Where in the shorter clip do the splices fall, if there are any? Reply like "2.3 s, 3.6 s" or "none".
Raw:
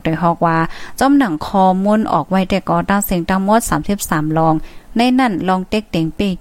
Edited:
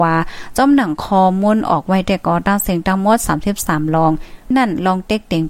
4.5 s